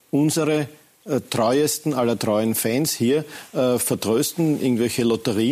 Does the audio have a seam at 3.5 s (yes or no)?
no